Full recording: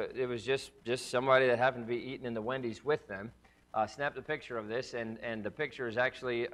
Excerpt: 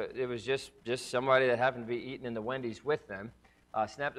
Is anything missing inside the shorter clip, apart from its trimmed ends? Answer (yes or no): no